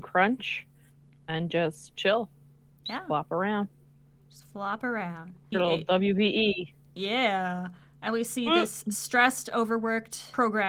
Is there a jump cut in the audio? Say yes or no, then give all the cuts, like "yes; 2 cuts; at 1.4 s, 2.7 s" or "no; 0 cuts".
yes; 1 cut; at 5.5 s